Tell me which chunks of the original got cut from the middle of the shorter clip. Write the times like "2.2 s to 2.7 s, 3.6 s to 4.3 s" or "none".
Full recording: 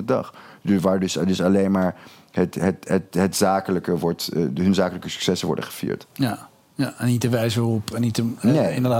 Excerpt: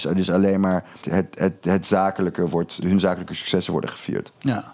2.1 s to 2.5 s, 4.3 s to 4.6 s